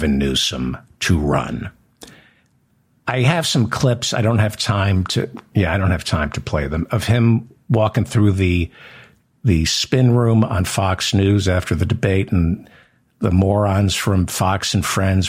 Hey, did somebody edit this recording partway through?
yes; 1 cut; at 5.5 s

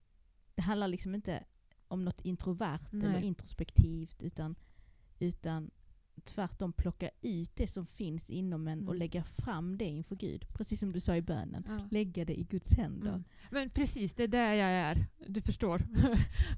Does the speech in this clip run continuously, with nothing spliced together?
yes; 0 cuts

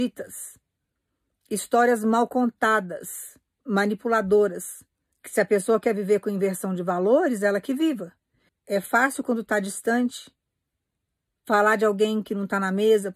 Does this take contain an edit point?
yes; 2 cuts; at 5.1 s, 8.5 s

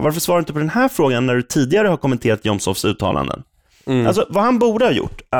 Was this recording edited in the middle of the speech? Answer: no; 0 cuts

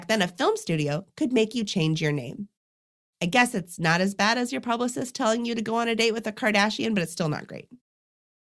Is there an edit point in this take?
no; 0 cuts

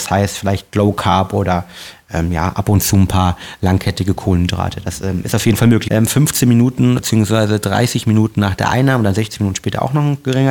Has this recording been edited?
yes; 2 cuts; at 5.9 s, 7.0 s

